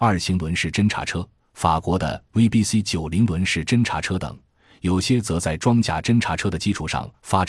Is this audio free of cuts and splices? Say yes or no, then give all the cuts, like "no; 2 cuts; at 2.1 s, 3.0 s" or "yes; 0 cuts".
yes; 0 cuts